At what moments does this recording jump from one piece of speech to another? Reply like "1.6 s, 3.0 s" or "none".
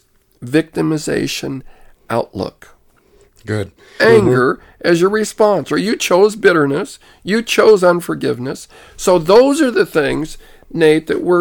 4.0 s